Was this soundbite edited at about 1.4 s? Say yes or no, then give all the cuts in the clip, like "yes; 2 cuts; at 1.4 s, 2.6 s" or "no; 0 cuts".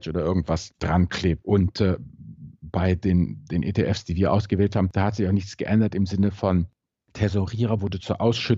yes; 1 cut; at 1.4 s